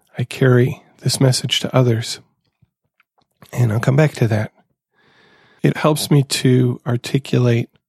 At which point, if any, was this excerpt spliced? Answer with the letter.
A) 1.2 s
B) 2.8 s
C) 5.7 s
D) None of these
C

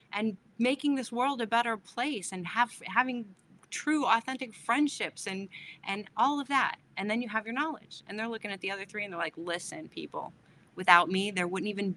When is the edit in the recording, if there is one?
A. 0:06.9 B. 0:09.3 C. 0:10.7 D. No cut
D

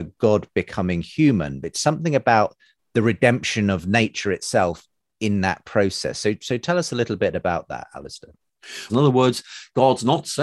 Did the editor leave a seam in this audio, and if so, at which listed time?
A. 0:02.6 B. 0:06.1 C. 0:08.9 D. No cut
C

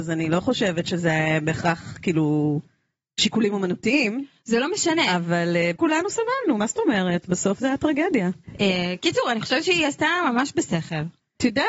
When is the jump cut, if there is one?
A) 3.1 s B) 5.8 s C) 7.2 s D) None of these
B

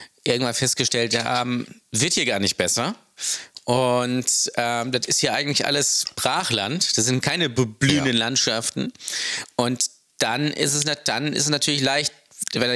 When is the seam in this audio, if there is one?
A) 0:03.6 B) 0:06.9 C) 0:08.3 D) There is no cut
D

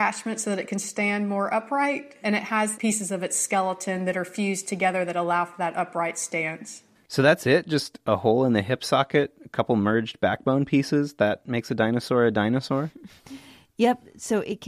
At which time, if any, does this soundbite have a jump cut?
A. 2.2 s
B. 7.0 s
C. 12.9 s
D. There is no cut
D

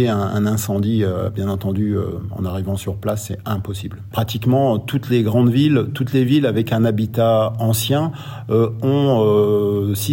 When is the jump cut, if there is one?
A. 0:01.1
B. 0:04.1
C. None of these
B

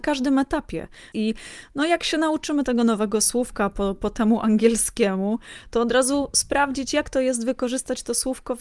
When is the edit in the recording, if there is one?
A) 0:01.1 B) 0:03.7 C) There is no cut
A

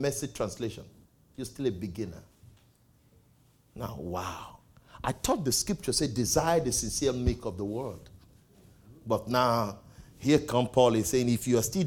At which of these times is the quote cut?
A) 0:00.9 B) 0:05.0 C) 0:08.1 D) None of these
D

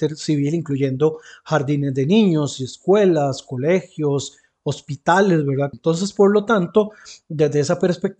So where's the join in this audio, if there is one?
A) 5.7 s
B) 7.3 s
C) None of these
A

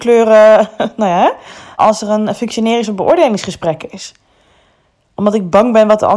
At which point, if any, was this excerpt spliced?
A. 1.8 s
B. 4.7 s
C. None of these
A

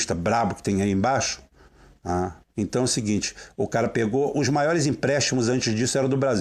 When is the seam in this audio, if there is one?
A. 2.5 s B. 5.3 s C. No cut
A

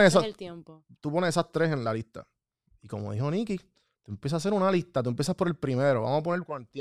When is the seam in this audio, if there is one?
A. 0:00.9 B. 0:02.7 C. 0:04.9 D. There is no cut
B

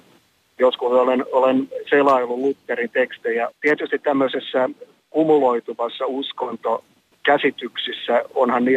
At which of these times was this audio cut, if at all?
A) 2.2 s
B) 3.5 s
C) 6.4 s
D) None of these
B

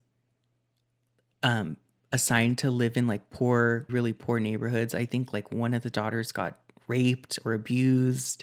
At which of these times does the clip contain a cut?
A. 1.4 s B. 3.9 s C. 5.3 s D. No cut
B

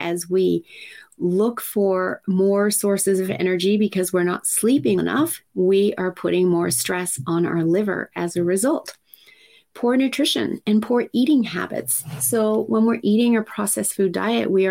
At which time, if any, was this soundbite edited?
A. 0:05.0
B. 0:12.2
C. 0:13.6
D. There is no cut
A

